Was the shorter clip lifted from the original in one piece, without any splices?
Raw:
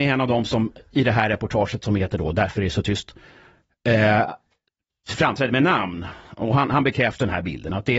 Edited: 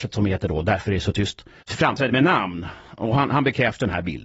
no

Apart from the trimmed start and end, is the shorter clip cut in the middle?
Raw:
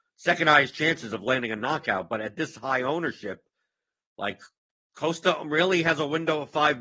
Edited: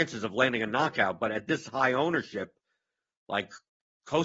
no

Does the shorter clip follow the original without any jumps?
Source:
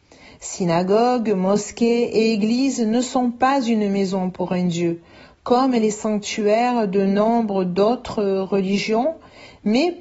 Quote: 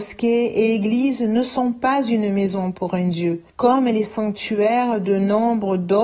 no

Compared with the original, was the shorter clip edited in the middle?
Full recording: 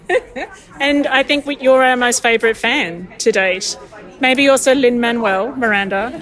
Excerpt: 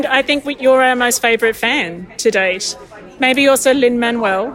no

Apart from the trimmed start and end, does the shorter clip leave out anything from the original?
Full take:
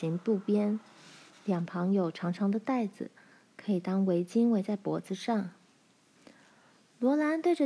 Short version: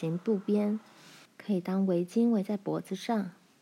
yes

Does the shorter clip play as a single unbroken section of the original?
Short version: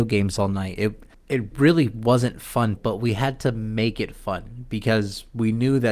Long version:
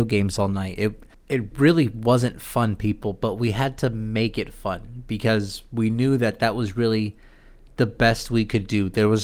no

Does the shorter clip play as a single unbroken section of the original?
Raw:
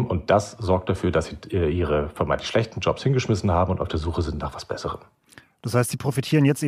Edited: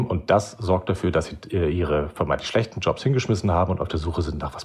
yes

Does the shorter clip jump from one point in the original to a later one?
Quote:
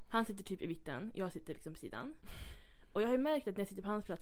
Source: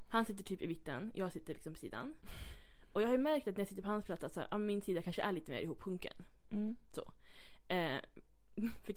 no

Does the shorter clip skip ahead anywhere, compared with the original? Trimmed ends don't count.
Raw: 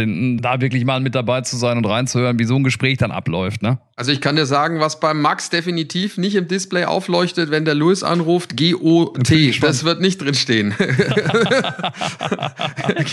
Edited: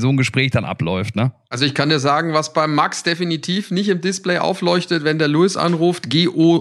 no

